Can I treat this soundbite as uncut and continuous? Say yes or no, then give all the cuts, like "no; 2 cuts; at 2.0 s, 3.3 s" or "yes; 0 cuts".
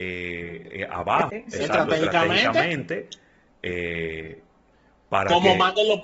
no; 1 cut; at 1.3 s